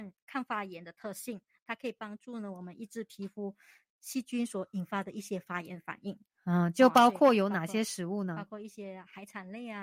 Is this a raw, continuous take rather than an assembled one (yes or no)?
yes